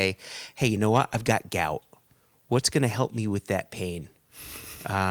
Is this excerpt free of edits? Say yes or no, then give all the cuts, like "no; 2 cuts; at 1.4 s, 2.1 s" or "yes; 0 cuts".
yes; 0 cuts